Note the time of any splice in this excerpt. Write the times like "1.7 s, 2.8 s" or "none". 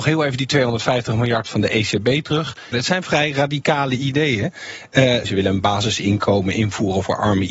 2.7 s, 5.2 s